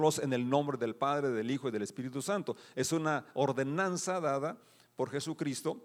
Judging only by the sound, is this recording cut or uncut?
uncut